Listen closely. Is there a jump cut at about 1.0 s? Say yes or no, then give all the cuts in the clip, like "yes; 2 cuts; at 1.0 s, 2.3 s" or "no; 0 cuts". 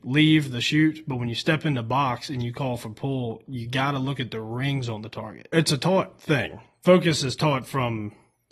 no; 1 cut; at 5.5 s